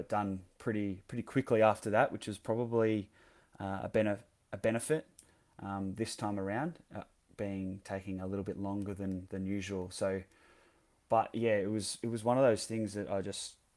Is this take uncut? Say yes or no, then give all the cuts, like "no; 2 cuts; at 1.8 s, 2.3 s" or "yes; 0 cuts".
yes; 0 cuts